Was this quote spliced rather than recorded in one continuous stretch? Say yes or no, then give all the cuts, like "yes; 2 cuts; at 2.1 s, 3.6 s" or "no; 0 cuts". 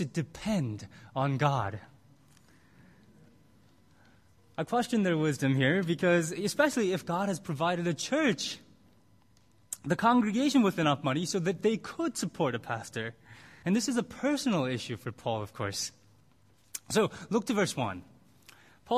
yes; 1 cut; at 13.6 s